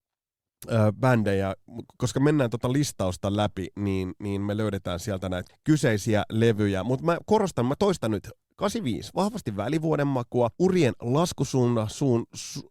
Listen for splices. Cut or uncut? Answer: cut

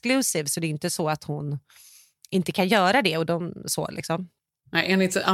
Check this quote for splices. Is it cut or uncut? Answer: uncut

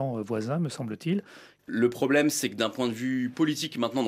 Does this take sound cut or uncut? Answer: cut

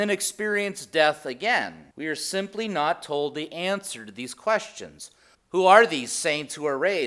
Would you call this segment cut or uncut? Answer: cut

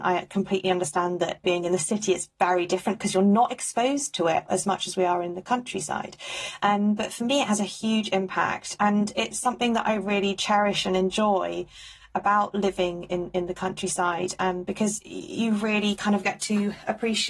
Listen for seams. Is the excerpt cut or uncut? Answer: uncut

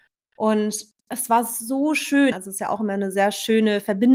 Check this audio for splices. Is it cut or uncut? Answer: cut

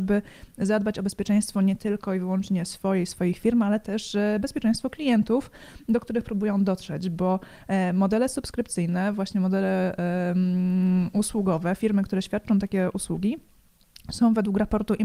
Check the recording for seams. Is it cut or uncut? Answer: uncut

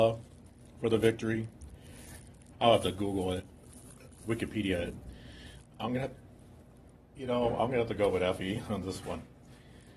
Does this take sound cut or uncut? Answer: cut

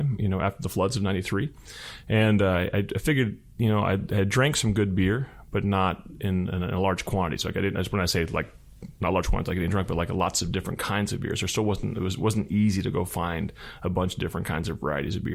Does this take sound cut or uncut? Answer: uncut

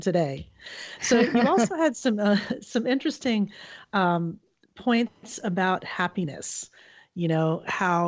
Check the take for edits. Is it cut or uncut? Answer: uncut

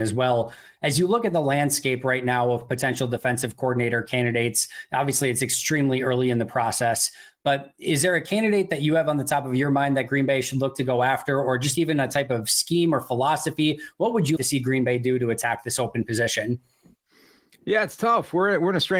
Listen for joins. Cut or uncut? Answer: cut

